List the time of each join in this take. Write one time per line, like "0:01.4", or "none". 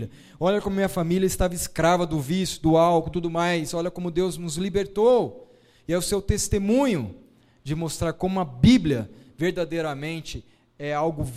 0:03.1